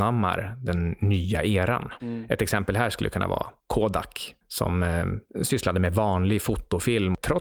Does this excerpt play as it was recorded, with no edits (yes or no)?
yes